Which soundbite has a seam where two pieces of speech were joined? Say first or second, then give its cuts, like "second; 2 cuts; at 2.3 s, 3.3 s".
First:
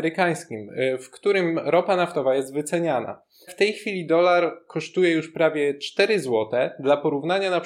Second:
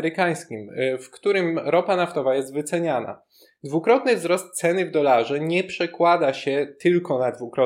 first; 1 cut; at 3.5 s